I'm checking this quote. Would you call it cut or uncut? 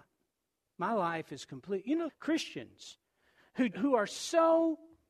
cut